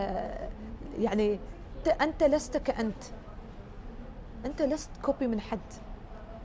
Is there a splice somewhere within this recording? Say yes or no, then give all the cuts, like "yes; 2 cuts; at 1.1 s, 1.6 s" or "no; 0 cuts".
yes; 1 cut; at 1.8 s